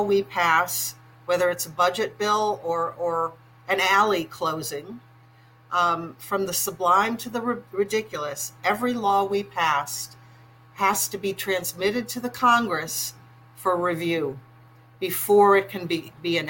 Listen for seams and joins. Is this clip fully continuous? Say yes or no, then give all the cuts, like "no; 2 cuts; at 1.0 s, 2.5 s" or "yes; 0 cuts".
yes; 0 cuts